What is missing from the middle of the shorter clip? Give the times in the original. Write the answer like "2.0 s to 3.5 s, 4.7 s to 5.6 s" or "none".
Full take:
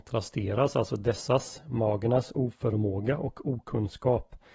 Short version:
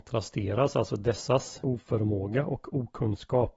1.6 s to 2.3 s